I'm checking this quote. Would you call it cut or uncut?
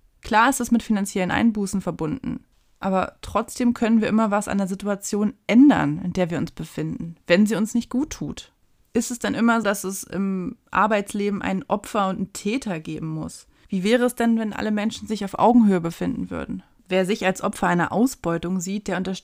cut